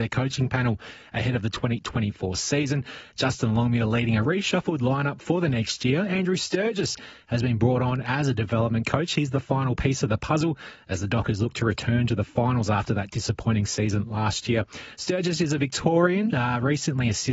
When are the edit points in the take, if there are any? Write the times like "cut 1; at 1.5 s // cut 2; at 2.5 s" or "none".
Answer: cut 1; at 16.3 s